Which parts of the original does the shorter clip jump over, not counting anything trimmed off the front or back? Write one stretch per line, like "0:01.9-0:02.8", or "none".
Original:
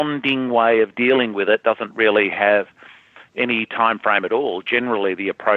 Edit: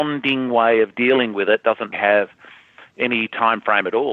0:01.9-0:02.3